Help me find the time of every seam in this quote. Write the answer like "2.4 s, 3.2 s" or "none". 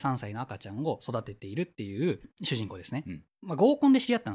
3.3 s